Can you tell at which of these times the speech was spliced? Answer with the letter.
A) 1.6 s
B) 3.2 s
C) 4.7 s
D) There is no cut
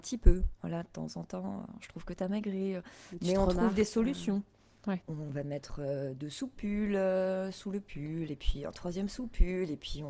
D